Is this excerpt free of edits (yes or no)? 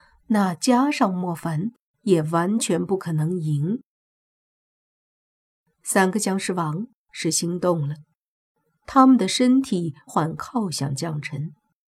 no